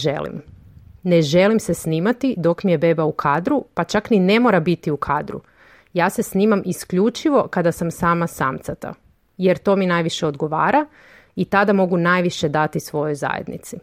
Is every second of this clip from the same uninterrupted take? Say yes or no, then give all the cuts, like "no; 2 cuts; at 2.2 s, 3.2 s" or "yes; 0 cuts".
yes; 0 cuts